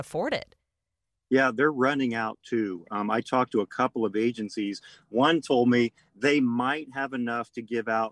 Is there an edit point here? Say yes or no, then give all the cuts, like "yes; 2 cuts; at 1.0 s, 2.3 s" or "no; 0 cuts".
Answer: no; 0 cuts